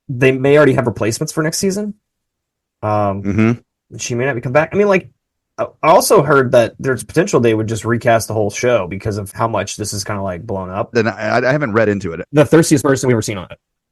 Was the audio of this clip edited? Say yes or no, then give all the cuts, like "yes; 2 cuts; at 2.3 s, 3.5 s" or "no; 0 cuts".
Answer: yes; 3 cuts; at 9.3 s, 10.9 s, 12.2 s